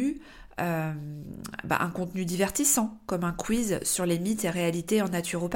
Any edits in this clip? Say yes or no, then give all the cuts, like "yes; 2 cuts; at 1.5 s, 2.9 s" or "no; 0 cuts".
no; 0 cuts